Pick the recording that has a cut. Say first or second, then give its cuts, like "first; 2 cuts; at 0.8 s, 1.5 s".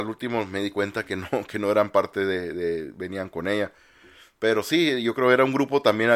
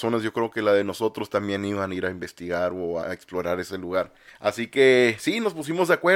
second; 2 cuts; at 3.0 s, 4.3 s